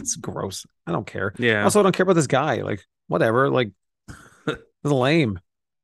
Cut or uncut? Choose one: uncut